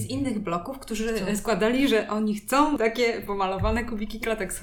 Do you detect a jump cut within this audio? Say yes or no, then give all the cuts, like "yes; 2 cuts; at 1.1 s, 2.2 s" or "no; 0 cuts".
no; 0 cuts